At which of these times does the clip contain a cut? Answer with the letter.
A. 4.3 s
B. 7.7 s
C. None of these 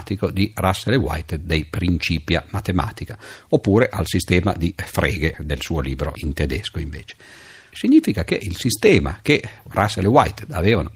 B